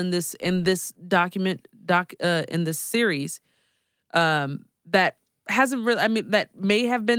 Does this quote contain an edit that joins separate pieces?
no; 0 cuts

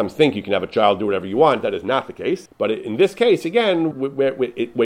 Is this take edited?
yes; 2 cuts; at 2.5 s, 3.9 s

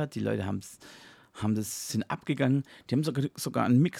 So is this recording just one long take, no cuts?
yes; 0 cuts

